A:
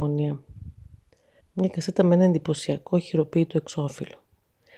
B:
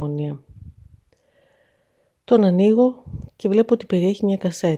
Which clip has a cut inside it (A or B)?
A